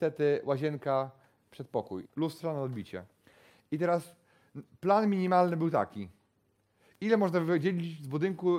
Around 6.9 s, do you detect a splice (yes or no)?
no